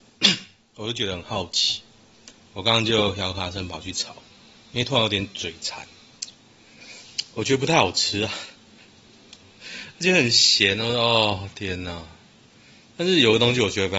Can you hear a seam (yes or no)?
no